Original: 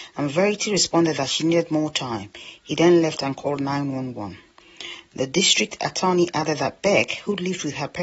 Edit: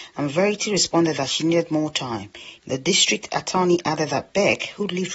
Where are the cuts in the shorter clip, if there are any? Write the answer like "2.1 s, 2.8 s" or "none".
2.6 s